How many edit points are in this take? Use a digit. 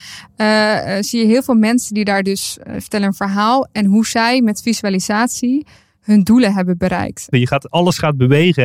1